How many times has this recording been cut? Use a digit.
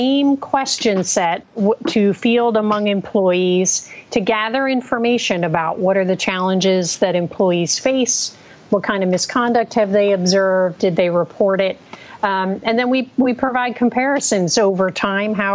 1